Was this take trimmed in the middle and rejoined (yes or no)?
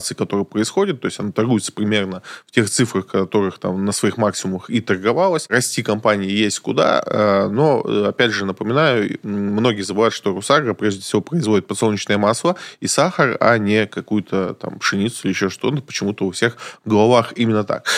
no